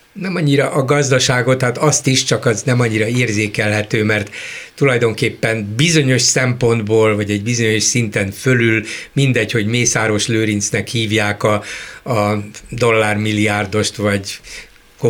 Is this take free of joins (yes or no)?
yes